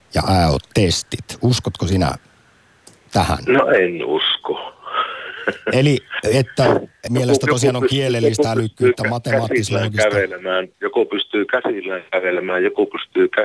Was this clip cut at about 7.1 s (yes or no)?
yes